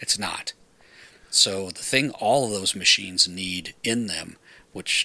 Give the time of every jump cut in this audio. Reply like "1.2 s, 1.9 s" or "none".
none